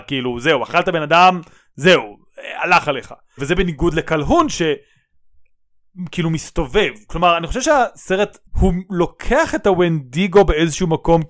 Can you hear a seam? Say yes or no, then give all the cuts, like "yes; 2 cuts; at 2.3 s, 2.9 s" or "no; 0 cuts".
yes; 2 cuts; at 3.4 s, 8.5 s